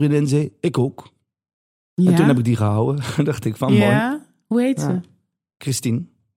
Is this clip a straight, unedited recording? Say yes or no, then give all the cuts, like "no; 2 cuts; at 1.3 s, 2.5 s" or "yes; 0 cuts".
yes; 0 cuts